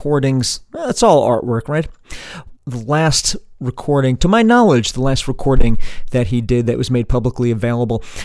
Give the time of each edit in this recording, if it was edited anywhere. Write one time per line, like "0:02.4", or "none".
0:02.6